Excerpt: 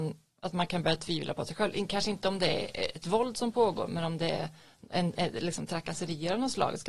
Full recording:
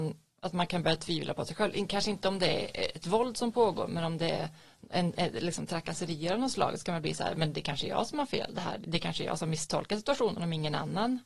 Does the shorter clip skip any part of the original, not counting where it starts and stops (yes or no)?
no